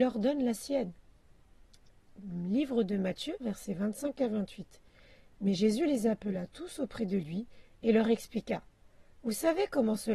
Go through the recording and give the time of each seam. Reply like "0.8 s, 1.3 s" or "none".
3.4 s